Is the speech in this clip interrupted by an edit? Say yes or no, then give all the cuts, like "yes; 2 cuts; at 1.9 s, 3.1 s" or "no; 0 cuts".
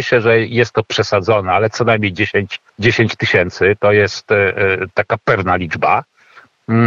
yes; 1 cut; at 2.7 s